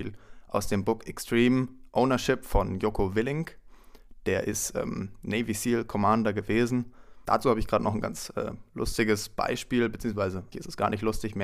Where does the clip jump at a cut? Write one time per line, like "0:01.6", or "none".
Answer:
0:07.3
0:10.5